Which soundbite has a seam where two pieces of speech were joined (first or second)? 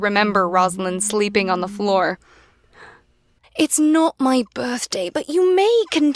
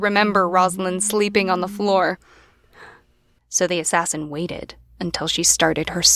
first